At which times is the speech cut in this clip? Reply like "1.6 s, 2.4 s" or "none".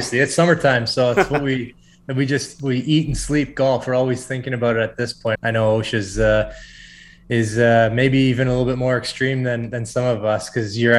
5.4 s